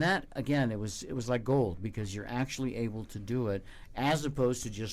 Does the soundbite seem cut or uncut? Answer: uncut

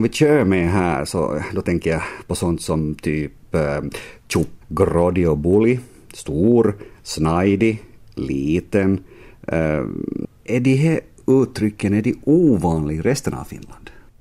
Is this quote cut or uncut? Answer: cut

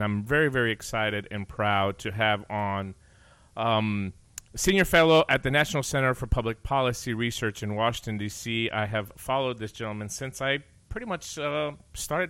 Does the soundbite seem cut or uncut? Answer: uncut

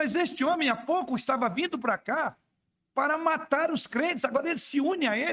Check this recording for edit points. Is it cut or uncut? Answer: uncut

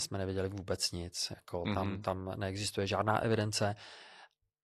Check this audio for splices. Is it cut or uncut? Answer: uncut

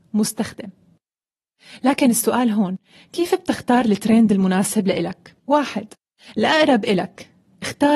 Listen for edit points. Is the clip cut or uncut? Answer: cut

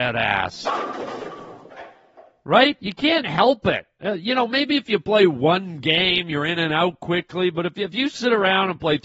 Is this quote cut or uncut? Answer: uncut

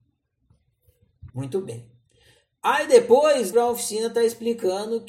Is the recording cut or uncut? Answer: cut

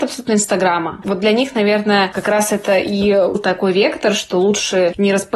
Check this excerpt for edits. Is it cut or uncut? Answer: cut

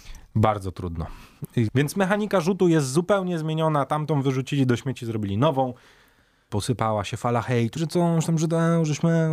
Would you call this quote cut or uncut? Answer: cut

